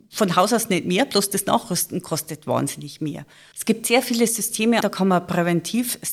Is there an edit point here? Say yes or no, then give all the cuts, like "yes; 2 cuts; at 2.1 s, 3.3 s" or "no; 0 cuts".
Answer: yes; 2 cuts; at 3.5 s, 4.8 s